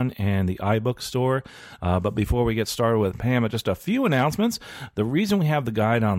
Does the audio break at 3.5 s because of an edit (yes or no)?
no